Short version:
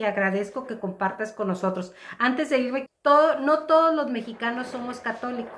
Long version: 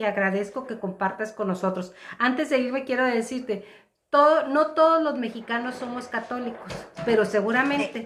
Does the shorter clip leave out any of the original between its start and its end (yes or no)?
yes